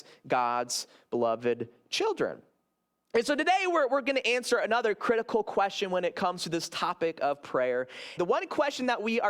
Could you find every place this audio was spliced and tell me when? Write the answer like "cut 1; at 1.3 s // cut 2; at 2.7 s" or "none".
cut 1; at 8.2 s